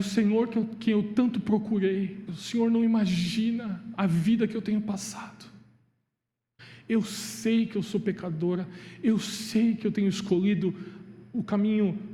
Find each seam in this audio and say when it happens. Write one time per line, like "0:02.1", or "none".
0:02.3